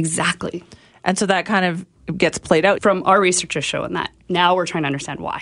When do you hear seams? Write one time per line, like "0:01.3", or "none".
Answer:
0:02.8